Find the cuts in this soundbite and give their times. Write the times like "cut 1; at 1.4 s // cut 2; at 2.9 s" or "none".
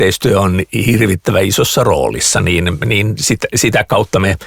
none